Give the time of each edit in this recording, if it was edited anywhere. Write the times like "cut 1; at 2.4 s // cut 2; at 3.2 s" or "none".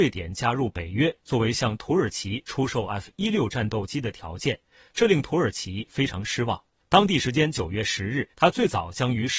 cut 1; at 6.8 s // cut 2; at 8.3 s